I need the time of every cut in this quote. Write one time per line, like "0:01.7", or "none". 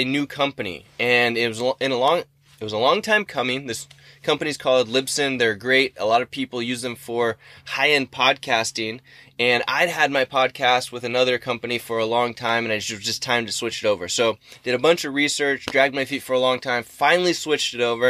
none